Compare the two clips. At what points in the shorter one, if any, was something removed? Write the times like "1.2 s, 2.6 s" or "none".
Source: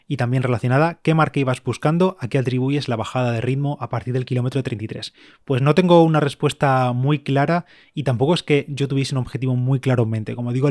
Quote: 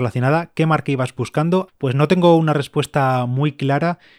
1.7 s